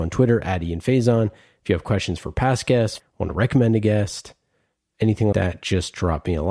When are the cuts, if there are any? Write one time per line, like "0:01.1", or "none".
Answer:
0:03.0
0:05.3